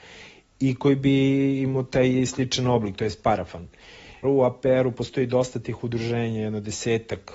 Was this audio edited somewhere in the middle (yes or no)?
yes